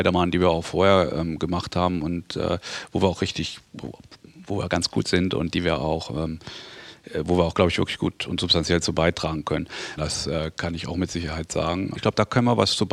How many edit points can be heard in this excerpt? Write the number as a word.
two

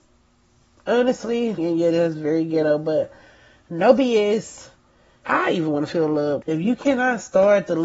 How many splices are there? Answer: three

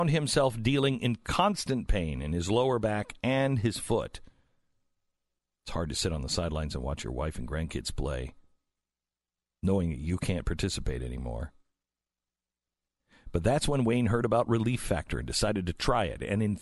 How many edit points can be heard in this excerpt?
zero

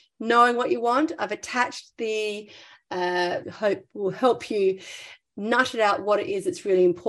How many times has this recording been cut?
one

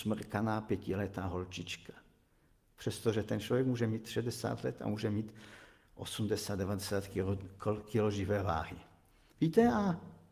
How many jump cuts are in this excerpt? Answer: one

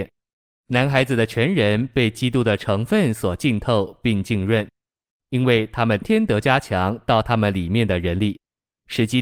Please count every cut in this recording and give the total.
one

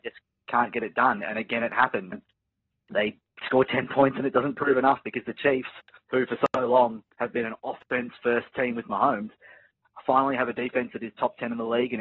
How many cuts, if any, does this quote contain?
one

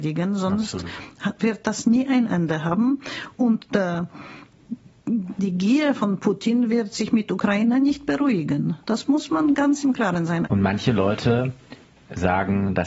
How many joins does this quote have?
two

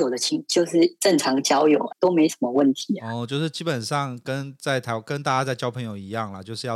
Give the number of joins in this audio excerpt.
one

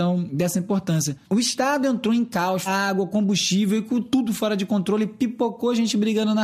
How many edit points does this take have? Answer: two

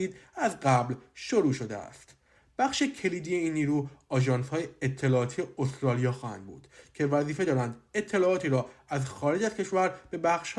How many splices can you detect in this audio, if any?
zero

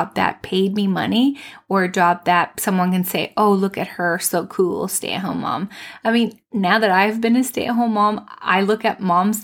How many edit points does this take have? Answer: one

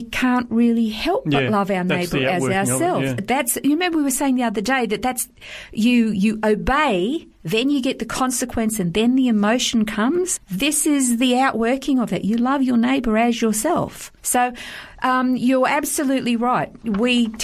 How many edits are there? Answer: two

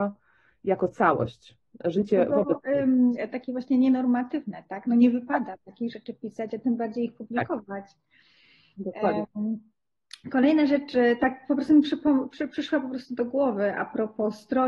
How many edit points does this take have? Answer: zero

